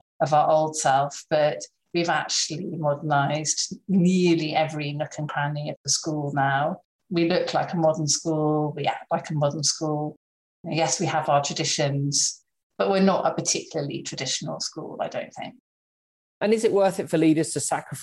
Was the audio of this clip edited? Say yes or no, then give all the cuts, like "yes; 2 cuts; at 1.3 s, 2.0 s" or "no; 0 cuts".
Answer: no; 0 cuts